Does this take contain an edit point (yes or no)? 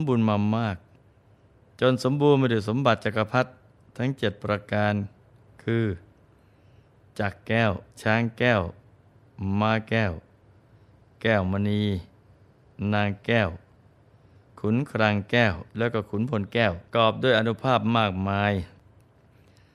yes